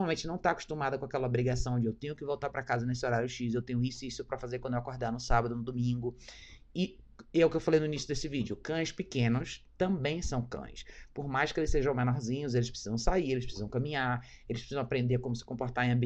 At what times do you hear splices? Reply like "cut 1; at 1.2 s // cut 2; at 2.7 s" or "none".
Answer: none

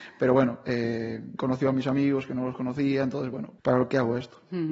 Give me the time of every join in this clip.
cut 1; at 1.4 s // cut 2; at 3.6 s

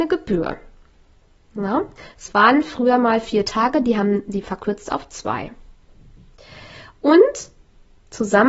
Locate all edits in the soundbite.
none

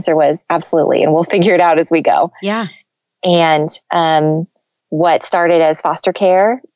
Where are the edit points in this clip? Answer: cut 1; at 3.8 s

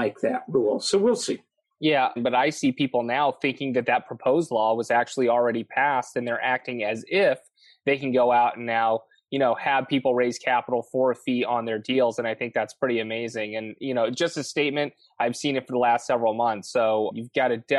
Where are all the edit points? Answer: cut 1; at 2.2 s

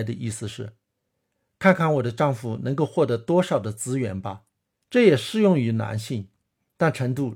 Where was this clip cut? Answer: cut 1; at 4.8 s

